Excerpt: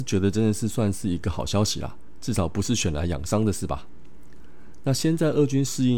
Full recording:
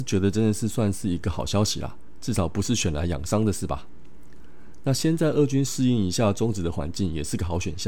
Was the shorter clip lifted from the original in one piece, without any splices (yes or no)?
yes